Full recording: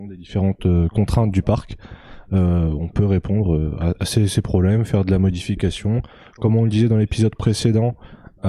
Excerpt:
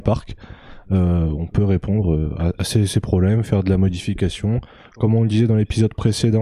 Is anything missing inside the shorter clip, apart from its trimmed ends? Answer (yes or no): no